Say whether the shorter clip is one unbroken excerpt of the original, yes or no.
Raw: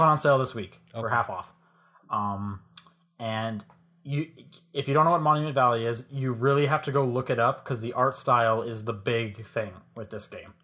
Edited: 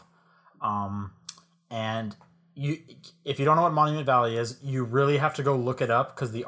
yes